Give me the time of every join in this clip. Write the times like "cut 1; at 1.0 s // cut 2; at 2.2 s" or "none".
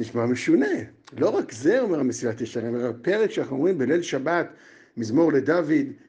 none